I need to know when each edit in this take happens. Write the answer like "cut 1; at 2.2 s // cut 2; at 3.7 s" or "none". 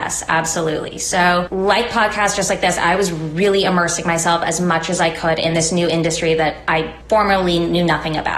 none